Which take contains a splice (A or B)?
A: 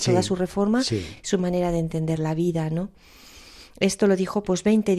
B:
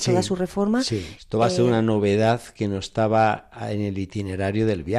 B